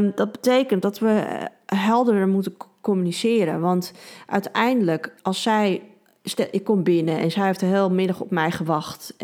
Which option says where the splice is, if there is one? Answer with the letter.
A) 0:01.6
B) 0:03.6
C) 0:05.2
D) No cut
C